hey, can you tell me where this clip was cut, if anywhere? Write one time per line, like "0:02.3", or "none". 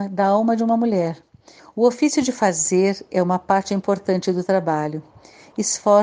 0:01.6